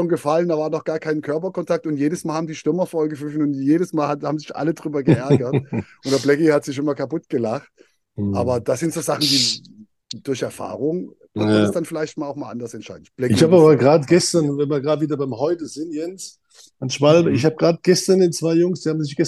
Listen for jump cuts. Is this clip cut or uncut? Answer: uncut